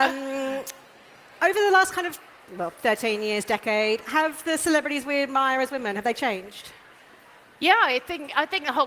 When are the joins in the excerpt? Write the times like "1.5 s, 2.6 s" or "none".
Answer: none